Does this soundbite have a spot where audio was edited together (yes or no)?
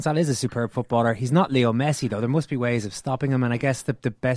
no